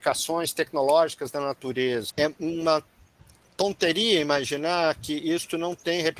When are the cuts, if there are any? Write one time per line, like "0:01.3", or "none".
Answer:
0:02.1